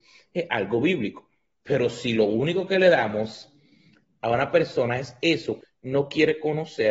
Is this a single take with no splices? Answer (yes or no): no